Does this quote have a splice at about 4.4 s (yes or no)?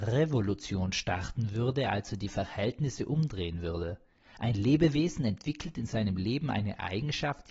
no